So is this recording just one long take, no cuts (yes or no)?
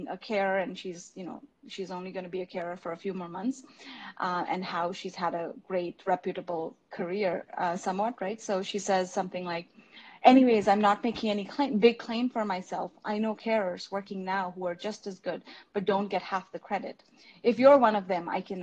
yes